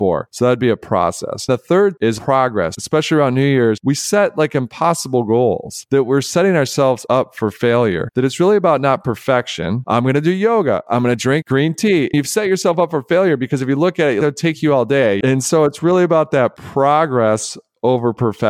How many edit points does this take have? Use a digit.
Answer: 2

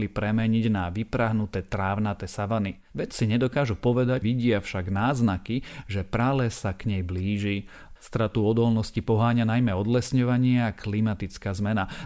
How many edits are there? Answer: 2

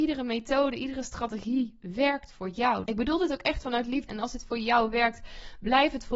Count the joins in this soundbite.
2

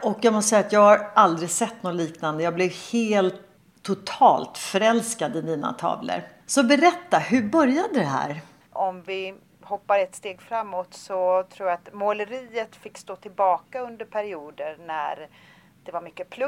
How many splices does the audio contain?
1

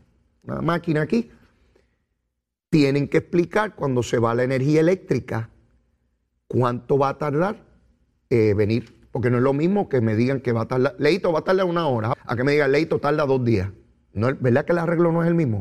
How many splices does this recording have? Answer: 1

